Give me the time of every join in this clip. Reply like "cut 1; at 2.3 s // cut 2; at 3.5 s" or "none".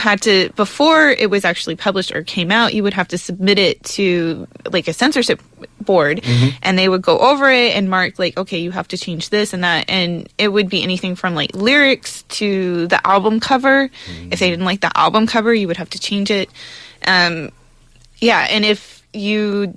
none